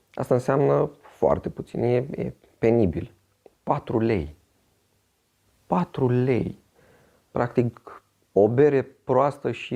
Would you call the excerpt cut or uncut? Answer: uncut